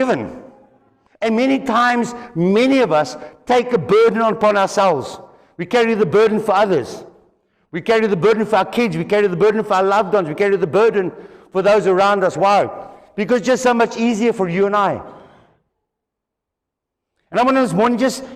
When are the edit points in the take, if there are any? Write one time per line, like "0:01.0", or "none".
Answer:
0:01.1